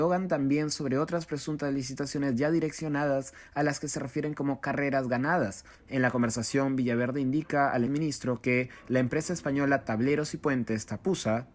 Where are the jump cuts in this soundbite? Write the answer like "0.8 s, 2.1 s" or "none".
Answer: 5.8 s, 7.9 s